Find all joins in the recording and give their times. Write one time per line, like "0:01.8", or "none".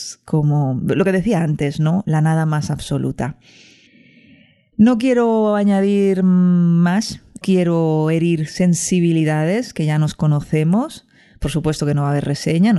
none